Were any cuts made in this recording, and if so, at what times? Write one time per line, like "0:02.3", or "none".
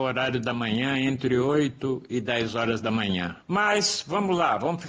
0:03.4